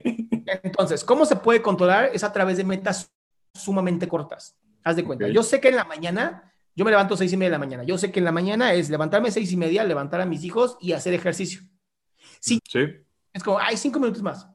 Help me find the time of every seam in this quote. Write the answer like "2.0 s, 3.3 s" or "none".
12.6 s